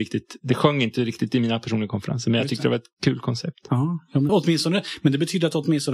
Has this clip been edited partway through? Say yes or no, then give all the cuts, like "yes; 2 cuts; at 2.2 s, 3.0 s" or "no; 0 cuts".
yes; 1 cut; at 4.3 s